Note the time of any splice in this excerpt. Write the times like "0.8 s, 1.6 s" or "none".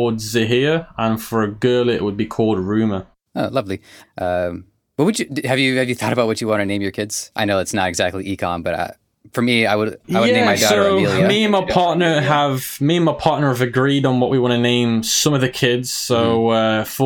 4.0 s